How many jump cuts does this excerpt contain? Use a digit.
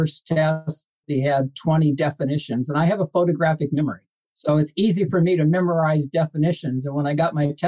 1